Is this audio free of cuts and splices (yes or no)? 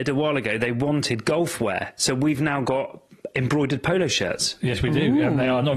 yes